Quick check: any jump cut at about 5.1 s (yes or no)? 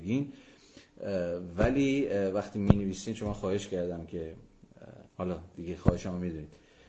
yes